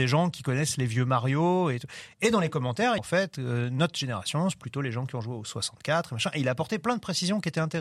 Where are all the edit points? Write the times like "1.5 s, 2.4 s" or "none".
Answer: 3.0 s